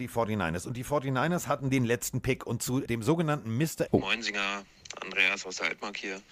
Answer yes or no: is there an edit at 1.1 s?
no